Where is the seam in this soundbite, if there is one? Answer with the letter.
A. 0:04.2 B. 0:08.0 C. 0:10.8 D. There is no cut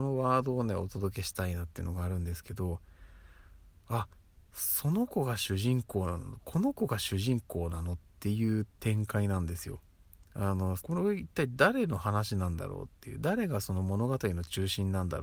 C